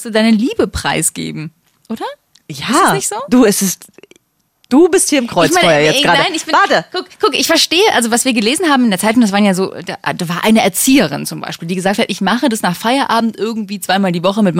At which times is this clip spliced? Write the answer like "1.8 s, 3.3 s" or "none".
none